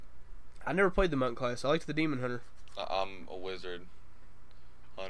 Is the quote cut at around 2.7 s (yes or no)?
no